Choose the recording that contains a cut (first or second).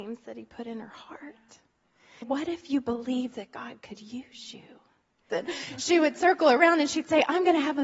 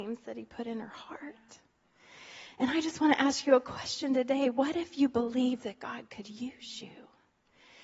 first